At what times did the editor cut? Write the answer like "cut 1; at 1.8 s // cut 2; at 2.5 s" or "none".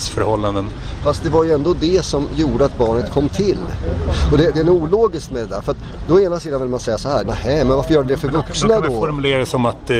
cut 1; at 7.2 s